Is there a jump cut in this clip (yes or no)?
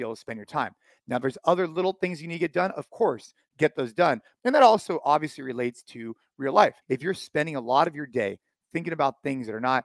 yes